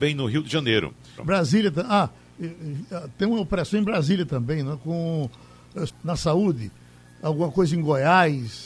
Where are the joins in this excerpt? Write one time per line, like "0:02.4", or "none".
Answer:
0:01.2
0:05.9

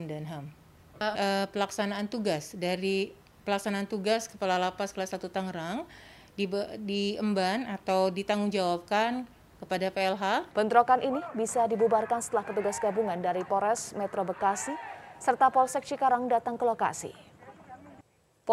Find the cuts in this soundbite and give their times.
0:01.1
0:10.5

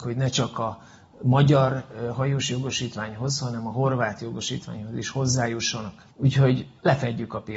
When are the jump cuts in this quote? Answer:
0:06.1

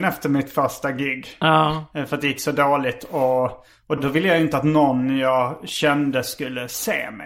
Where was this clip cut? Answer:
0:04.0

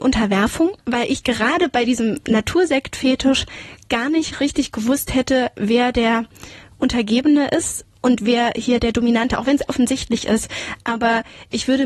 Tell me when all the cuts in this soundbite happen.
0:09.7

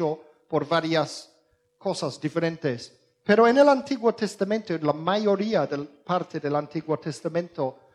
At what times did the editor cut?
none

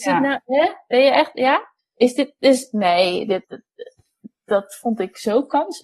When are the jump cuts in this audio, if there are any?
0:01.8
0:03.4

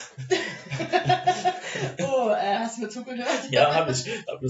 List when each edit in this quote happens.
none

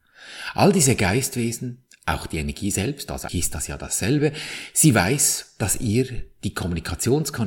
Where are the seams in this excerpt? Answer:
0:03.3

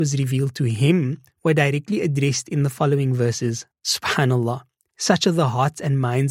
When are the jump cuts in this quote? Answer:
0:03.7

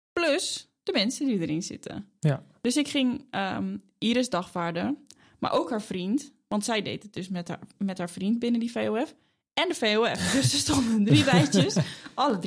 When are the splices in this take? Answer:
none

